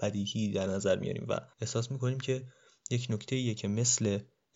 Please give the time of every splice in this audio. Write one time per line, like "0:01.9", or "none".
0:01.5